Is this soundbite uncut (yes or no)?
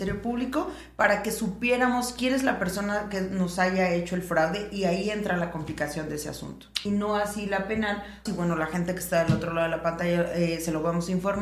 no